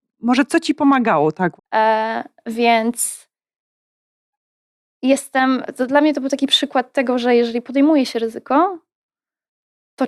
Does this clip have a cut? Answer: yes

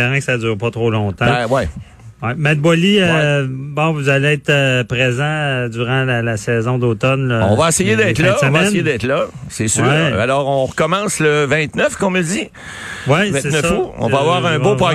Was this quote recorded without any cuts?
yes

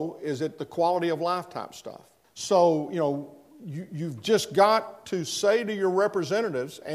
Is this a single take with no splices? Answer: no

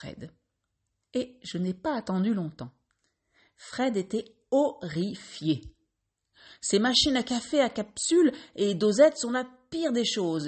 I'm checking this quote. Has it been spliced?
no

